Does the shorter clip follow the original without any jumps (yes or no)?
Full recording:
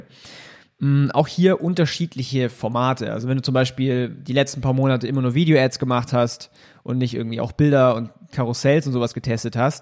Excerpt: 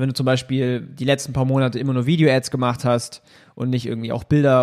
yes